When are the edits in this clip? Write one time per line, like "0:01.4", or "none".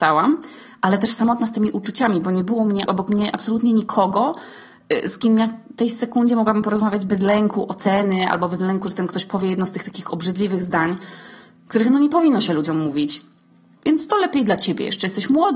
0:02.9
0:13.8